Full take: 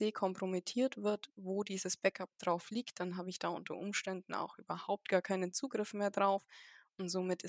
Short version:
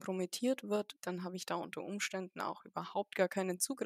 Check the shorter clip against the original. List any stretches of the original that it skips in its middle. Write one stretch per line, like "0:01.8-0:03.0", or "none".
0:01.3-0:02.9